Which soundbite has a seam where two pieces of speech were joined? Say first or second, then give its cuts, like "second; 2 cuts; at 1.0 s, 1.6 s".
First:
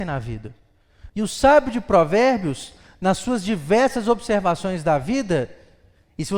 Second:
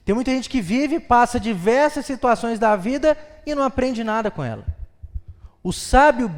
first; 1 cut; at 1.1 s